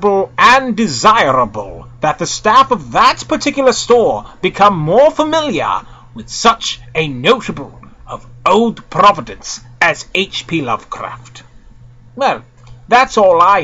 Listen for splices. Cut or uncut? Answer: uncut